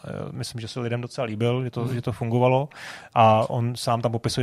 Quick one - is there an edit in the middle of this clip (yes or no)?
no